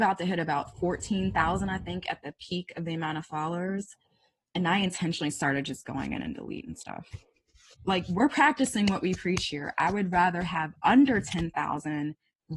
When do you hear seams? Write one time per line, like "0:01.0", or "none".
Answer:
0:07.7